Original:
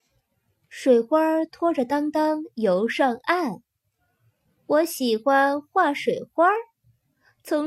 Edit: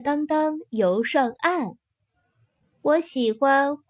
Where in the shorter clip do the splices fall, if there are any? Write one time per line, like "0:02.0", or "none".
none